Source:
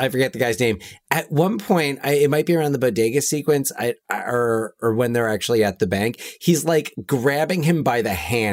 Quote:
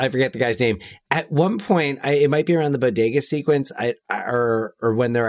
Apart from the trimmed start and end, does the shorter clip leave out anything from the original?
no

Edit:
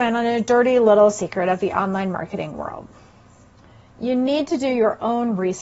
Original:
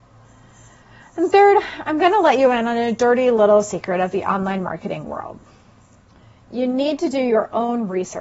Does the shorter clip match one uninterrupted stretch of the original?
yes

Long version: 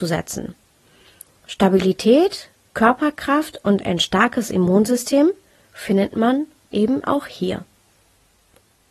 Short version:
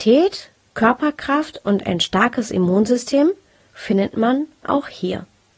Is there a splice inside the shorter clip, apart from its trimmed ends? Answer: yes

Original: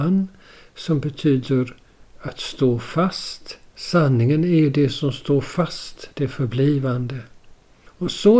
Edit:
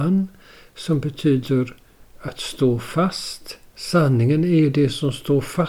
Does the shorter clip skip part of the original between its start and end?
no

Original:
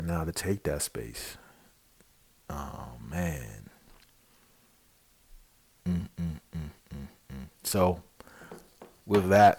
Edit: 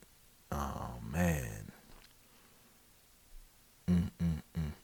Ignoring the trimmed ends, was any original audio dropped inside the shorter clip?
no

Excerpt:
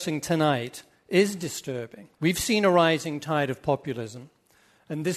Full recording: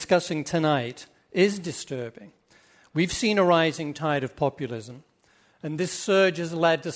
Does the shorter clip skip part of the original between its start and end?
yes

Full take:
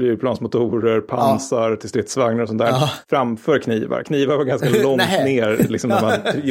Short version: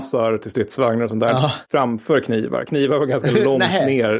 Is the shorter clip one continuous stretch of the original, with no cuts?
yes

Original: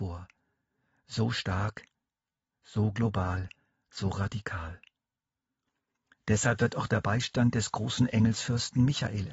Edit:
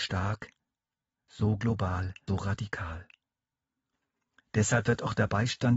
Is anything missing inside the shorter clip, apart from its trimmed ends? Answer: yes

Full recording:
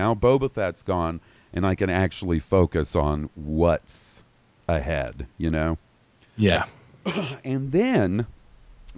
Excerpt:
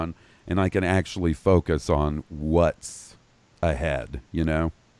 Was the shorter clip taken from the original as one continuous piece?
yes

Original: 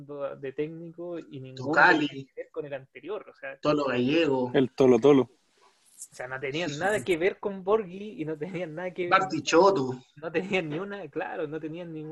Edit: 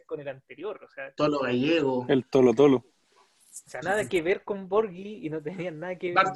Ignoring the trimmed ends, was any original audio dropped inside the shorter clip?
yes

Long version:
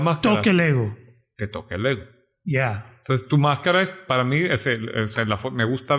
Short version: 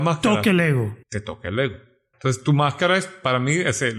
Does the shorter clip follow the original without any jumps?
no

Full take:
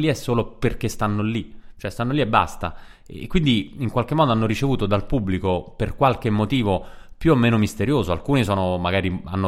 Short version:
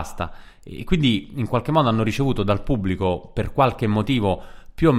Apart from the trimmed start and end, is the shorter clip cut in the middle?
no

